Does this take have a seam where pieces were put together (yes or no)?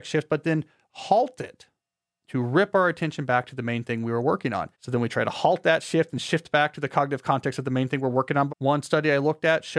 yes